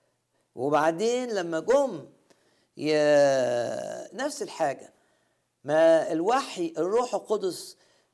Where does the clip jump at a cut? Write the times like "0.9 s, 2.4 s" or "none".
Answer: 4.1 s